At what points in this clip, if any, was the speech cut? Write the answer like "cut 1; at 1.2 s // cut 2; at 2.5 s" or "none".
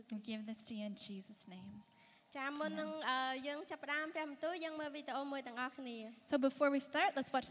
none